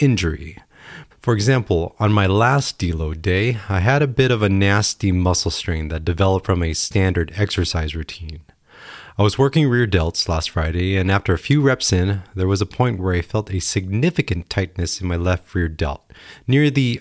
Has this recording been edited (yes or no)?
yes